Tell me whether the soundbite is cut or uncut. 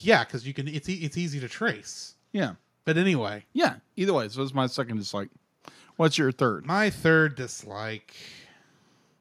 uncut